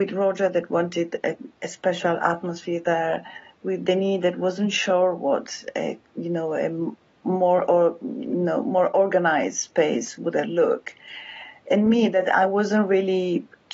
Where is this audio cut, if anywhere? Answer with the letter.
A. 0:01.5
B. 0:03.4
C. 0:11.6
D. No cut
D